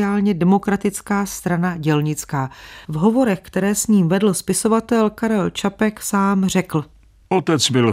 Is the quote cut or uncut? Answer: cut